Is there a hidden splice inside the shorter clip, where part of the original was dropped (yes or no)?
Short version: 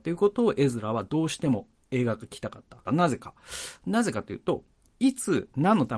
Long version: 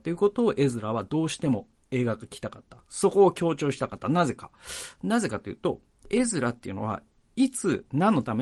yes